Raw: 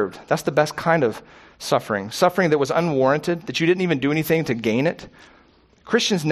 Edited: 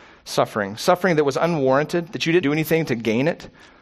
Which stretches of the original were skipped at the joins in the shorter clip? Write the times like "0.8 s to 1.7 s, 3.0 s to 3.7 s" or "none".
3.7 s to 4.0 s